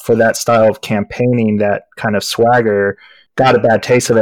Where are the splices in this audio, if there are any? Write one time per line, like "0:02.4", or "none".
0:03.3